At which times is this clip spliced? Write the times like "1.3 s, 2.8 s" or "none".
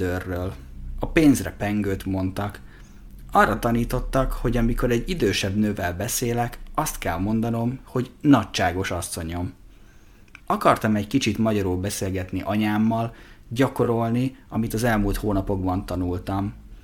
10.4 s

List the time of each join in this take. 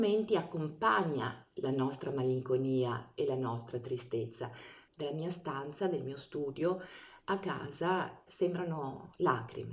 4.9 s, 8.3 s

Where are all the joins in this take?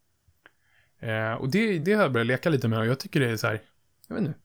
1.8 s

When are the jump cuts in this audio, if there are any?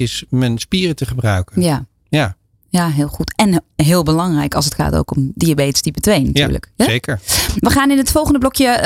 none

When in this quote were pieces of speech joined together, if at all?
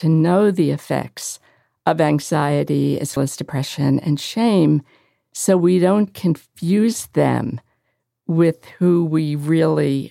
3.2 s

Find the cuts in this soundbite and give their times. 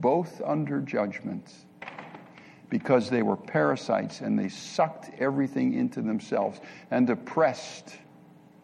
none

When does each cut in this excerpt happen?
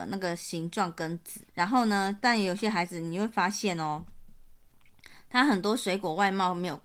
1.5 s

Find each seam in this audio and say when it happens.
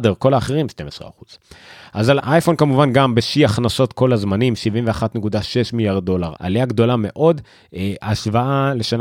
2.2 s, 6.4 s, 8.0 s

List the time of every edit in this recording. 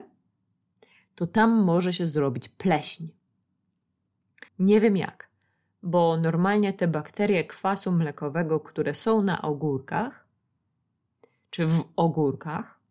4.5 s

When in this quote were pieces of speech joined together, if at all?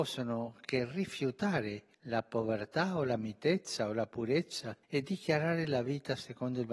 1.9 s, 4.8 s

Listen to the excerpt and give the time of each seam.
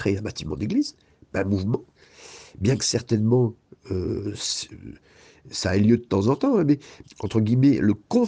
7.0 s

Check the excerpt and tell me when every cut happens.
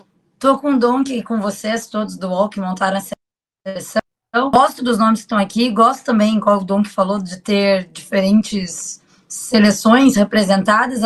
4.8 s

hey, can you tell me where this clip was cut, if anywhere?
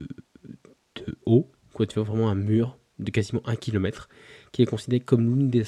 none

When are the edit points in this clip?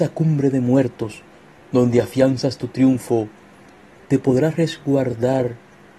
none

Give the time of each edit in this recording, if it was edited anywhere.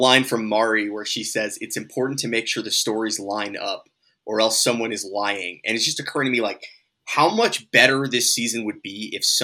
none

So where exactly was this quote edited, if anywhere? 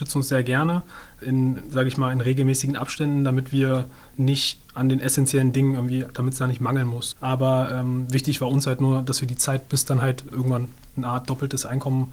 7.1 s, 10.3 s

